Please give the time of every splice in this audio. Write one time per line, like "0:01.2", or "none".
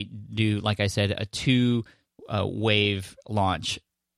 none